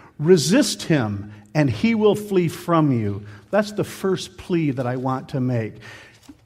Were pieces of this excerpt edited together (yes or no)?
no